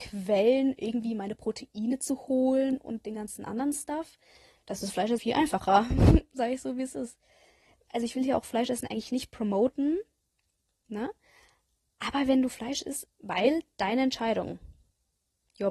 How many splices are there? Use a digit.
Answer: 2